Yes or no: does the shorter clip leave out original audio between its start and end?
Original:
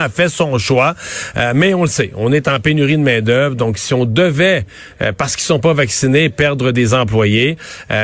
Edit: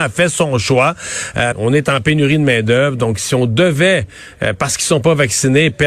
yes